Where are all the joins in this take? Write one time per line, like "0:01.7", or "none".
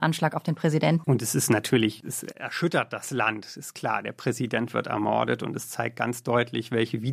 0:01.0